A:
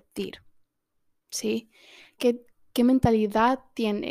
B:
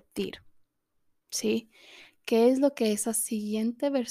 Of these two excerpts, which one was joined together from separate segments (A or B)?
A